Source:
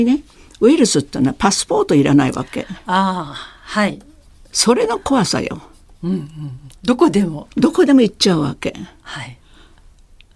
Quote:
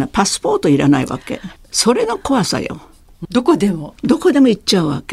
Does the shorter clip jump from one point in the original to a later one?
yes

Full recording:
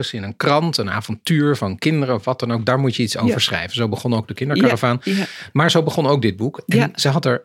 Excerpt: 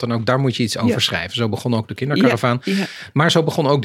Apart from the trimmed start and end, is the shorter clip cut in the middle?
no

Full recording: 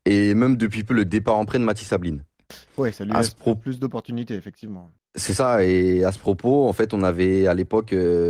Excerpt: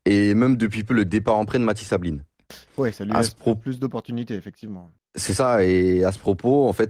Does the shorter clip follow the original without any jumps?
yes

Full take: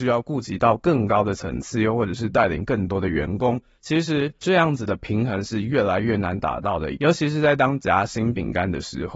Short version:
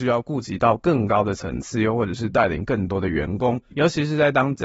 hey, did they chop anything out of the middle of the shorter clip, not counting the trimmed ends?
yes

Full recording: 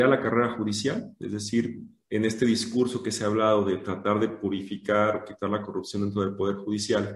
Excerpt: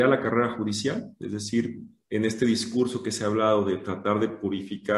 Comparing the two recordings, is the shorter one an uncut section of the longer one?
yes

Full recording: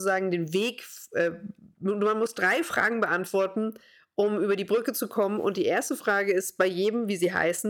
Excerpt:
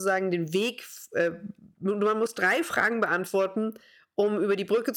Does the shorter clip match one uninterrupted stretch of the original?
yes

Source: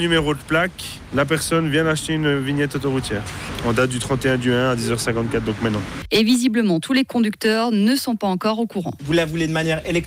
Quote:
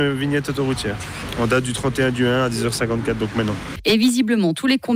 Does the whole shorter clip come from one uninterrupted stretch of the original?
yes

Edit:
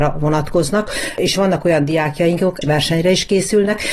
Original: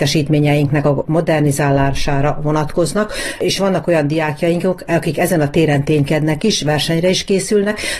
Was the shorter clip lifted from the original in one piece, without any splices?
no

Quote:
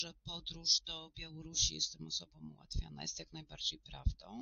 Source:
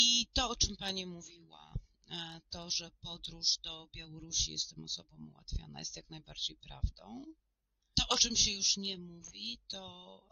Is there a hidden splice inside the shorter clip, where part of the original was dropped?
no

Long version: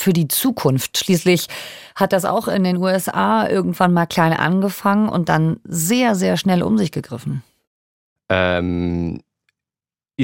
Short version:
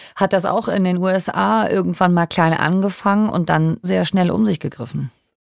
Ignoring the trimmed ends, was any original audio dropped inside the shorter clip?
yes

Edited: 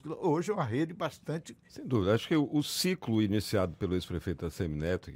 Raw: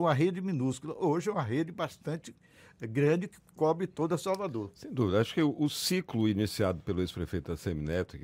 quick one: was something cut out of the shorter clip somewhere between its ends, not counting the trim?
yes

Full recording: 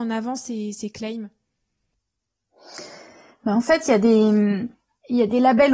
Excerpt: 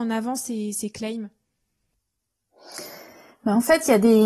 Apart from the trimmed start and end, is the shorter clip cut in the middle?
no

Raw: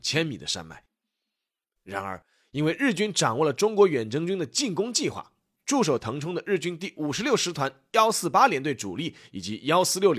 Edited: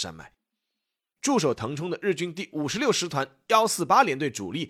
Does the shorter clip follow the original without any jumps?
no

